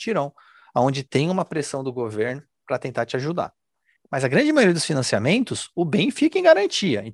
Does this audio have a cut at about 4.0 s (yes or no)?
yes